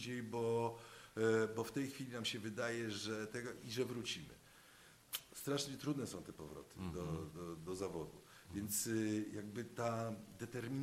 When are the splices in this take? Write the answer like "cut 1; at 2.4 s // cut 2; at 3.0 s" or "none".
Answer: cut 1; at 7.6 s